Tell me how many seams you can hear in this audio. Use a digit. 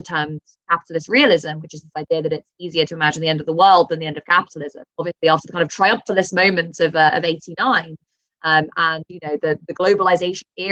2